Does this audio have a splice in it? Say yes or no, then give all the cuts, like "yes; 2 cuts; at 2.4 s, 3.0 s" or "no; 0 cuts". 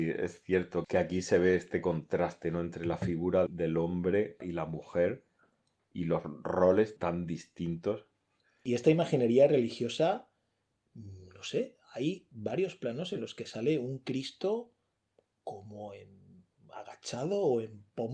no; 0 cuts